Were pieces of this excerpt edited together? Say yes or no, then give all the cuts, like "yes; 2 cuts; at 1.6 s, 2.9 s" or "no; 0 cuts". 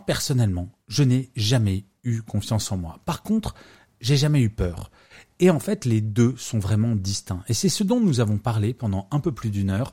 no; 0 cuts